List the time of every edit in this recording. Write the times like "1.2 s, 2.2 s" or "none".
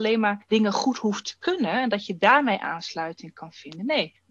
none

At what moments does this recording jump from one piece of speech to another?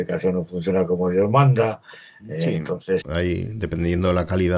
3.0 s

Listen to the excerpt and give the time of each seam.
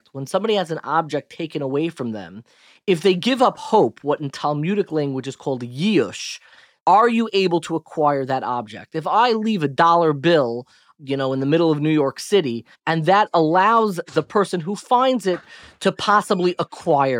12.8 s

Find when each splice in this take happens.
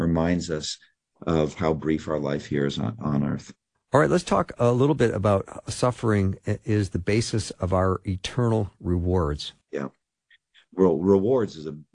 3.7 s, 9.6 s

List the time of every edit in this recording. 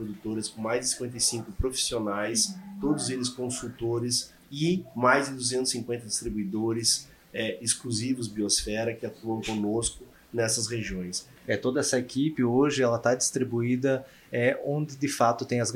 4.4 s, 11.4 s

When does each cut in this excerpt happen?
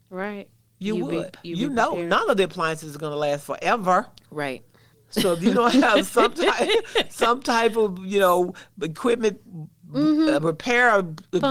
none

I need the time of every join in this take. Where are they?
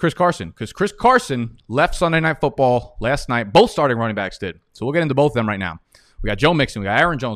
none

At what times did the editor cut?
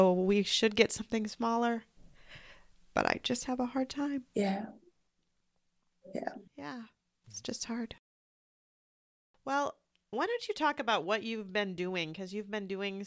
6.5 s

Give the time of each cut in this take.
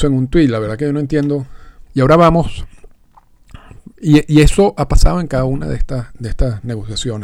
1.9 s, 3.9 s

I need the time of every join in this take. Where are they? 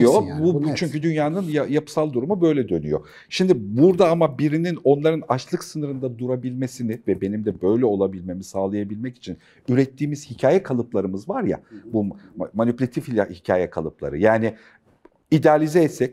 none

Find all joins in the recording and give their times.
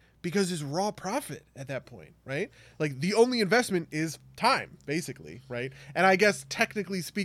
none

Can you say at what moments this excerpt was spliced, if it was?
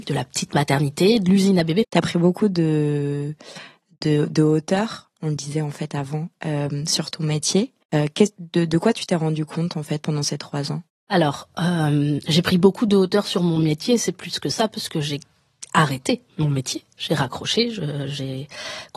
1.8 s, 7.8 s

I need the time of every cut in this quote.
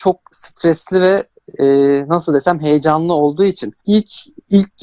3.8 s

